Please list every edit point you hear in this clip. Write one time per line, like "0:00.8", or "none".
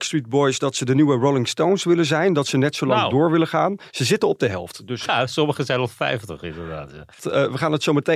0:05.1
0:07.2